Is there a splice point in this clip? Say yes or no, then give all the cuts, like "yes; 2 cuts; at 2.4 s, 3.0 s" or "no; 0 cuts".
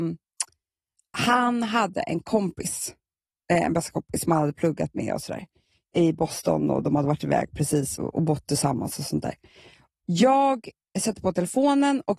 yes; 2 cuts; at 8.0 s, 9.9 s